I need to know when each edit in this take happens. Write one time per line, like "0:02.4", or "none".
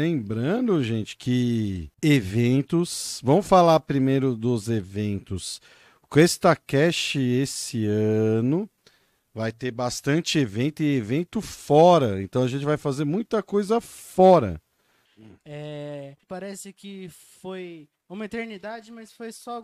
0:01.9
0:15.1
0:16.2